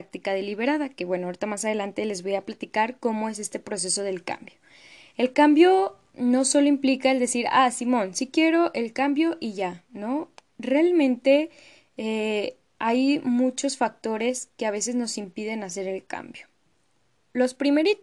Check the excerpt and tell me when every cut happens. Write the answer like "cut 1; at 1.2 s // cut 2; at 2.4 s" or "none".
none

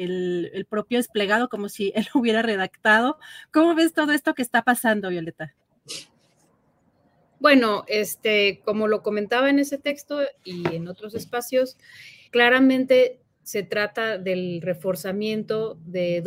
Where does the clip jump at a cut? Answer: cut 1; at 12.3 s

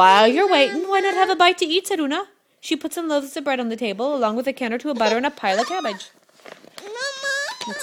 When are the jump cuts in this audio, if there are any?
none

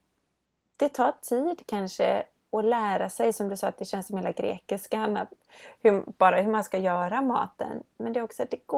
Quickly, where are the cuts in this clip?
none

